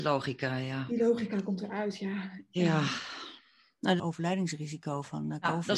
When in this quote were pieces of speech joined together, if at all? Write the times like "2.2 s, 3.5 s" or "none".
4.0 s